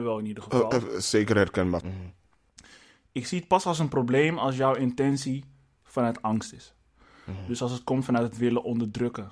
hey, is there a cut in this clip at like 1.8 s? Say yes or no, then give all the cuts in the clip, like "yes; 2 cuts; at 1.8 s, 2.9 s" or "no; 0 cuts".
yes; 1 cut; at 1.8 s